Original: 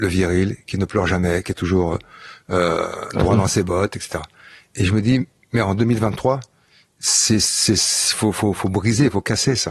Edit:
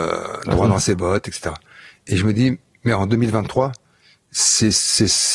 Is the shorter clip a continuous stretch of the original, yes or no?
yes